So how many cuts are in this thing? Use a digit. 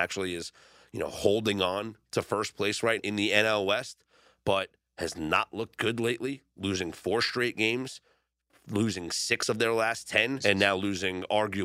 2